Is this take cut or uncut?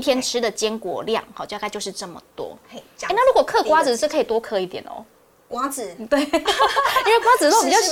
uncut